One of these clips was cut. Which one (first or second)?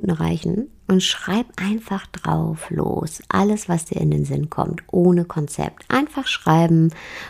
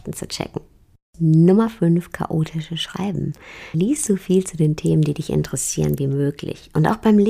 second